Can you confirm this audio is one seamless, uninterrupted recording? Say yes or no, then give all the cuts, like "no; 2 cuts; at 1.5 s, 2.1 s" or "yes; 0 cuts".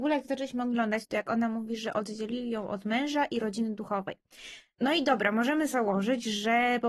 no; 1 cut; at 1.0 s